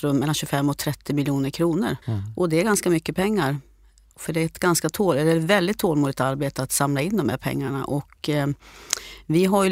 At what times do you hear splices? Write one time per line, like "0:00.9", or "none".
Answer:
0:02.0